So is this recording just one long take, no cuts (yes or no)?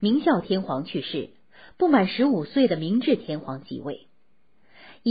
yes